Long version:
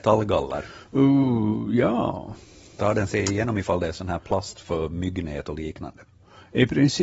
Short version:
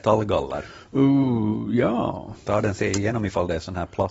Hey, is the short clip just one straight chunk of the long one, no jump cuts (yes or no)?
no